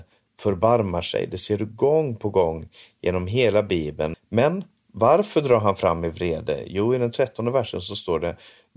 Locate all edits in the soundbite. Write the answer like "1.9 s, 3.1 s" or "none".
4.1 s

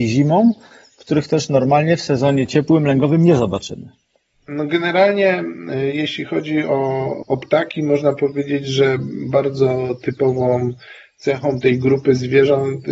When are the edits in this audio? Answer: none

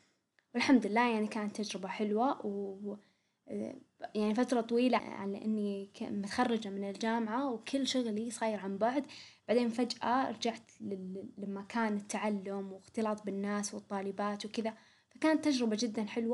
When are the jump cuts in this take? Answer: 5.0 s

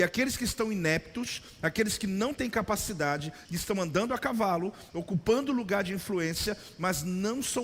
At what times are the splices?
3.5 s, 4.9 s

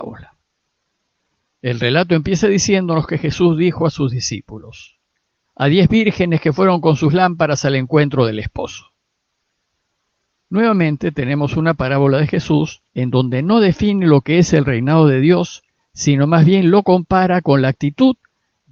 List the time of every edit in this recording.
5.5 s, 12.9 s

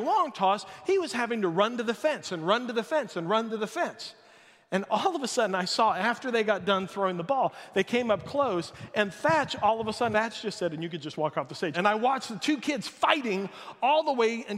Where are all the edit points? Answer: 10.1 s, 11.7 s

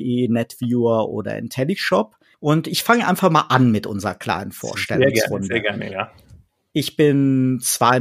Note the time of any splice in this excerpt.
2.3 s

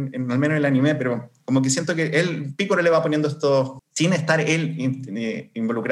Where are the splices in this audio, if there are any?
3.8 s

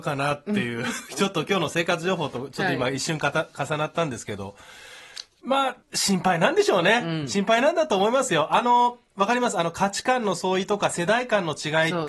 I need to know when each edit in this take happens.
1.0 s, 5.8 s

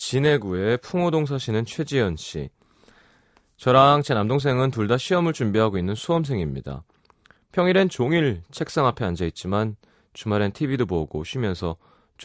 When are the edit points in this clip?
none

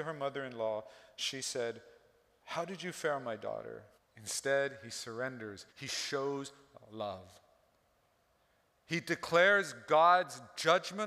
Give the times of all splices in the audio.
4.0 s, 5.7 s, 8.7 s

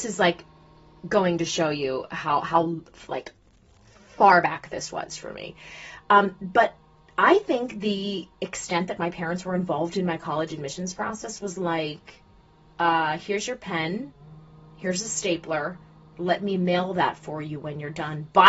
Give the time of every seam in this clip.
none

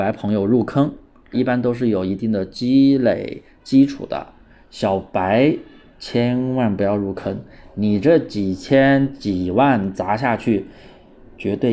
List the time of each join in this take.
1.3 s

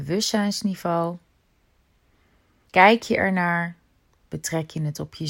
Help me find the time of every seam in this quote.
4.2 s

